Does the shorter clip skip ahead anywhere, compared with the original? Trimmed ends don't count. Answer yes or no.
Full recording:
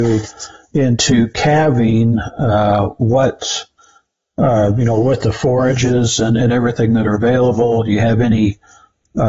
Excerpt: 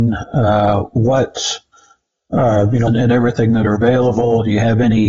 yes